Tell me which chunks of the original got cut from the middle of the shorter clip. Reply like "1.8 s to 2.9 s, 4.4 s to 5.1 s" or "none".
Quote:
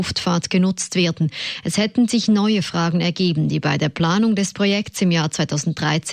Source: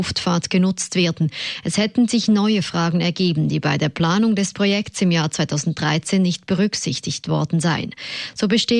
none